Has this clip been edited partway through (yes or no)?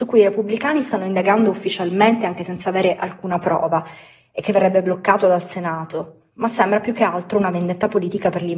no